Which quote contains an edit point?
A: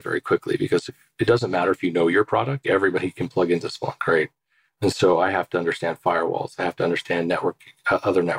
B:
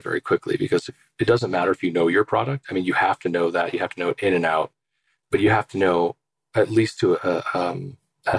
A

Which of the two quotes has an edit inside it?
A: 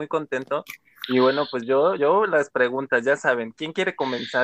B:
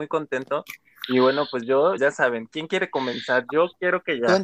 B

